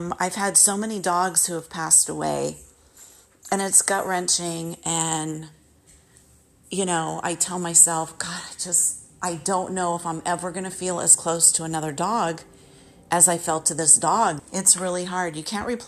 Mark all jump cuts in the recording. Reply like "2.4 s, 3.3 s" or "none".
14.4 s